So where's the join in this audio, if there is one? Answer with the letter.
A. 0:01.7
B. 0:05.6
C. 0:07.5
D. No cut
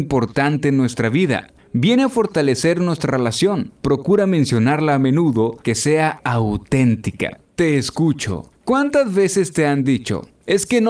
B